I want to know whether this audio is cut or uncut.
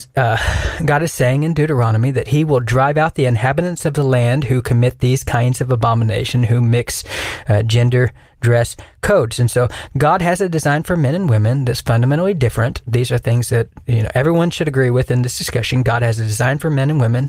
uncut